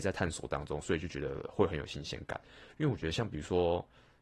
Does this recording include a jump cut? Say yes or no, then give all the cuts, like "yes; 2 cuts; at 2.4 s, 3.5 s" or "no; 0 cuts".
no; 0 cuts